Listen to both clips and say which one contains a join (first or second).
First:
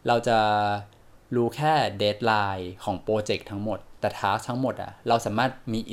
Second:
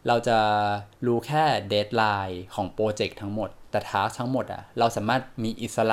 second